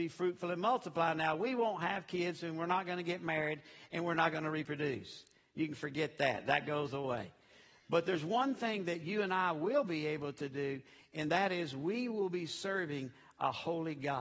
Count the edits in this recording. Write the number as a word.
zero